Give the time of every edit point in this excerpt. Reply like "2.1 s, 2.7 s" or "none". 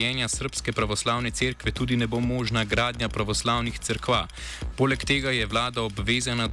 4.7 s